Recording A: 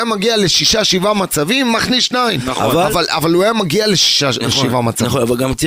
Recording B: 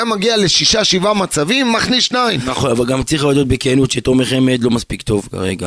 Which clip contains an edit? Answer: B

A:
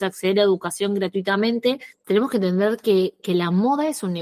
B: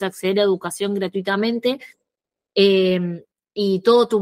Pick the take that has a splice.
A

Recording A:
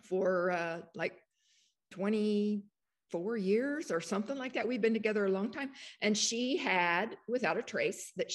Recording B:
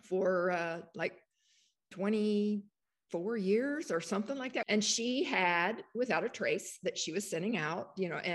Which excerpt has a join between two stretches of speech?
B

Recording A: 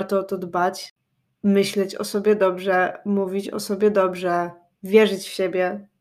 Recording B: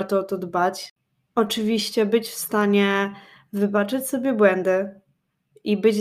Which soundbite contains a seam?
B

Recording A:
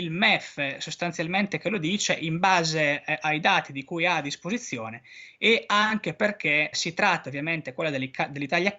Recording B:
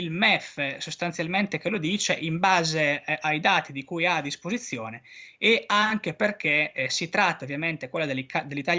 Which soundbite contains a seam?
A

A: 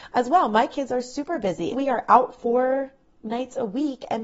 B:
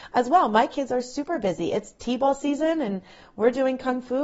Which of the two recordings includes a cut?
A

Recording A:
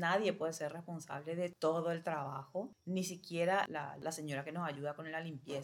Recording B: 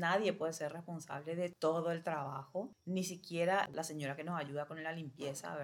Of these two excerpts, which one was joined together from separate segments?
B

